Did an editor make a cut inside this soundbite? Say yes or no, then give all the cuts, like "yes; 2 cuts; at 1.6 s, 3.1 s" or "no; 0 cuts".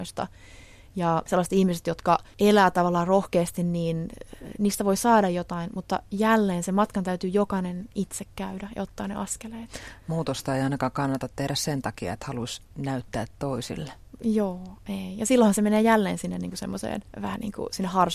no; 0 cuts